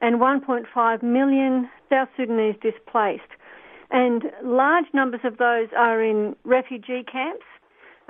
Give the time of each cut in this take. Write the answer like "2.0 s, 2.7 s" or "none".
none